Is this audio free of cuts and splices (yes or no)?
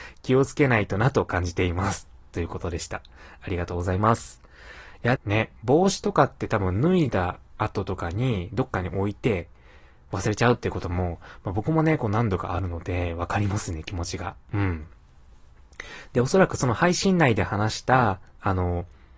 no